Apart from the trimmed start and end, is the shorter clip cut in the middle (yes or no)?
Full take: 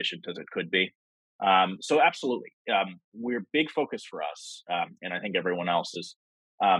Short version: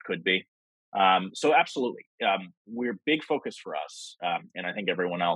no